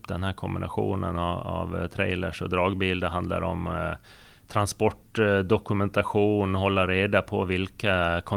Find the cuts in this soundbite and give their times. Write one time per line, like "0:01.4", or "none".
none